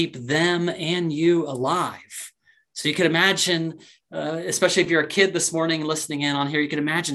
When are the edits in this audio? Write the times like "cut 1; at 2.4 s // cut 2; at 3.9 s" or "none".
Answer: none